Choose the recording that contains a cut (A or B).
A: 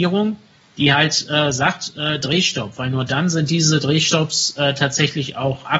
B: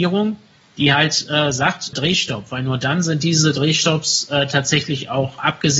B